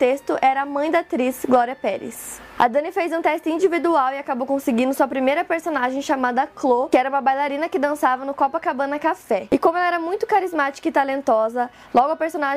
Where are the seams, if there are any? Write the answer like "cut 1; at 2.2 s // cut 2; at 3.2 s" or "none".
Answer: none